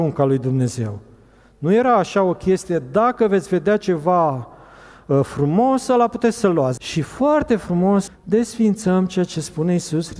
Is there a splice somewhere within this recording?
yes; 2 cuts; at 6.8 s, 8.1 s

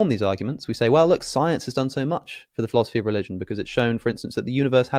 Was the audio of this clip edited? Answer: no; 0 cuts

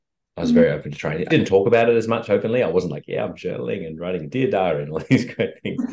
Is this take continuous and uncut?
no; 1 cut; at 1.3 s

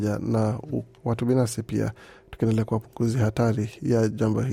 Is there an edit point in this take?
yes; 1 cut; at 1.0 s

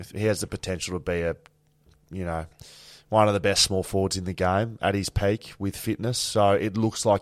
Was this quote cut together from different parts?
no; 0 cuts

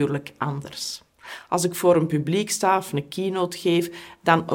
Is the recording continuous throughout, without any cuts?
yes; 0 cuts

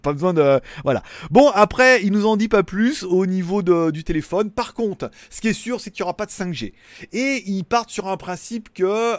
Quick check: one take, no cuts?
yes; 0 cuts

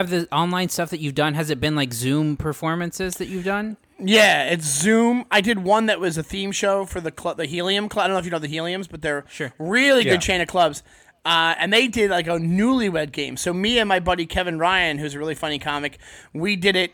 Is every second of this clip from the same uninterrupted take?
yes; 0 cuts

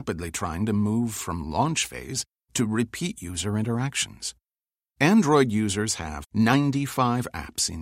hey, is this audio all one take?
no; 1 cut; at 6.2 s

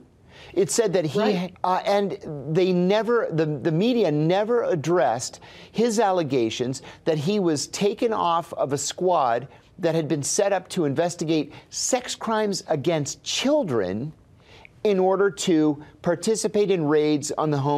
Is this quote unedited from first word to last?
no; 1 cut; at 1.5 s

